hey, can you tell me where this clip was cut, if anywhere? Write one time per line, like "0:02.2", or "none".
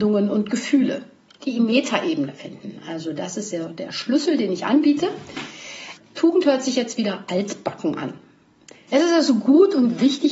0:01.3
0:06.0
0:08.9